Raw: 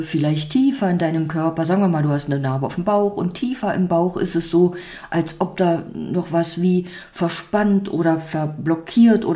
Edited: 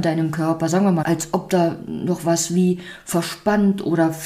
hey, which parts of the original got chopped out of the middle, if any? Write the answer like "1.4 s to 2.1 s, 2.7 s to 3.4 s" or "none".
2.0 s to 5.1 s